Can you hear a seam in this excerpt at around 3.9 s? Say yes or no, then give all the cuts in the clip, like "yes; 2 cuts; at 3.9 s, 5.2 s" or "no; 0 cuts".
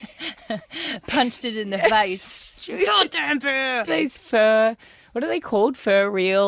yes; 1 cut; at 3.9 s